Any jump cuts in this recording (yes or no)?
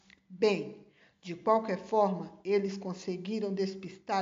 no